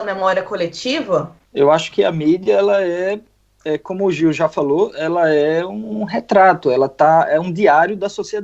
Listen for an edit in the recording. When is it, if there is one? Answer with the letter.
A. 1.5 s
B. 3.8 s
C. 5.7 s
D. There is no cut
A